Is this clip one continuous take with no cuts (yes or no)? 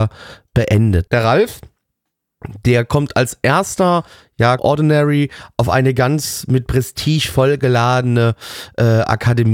no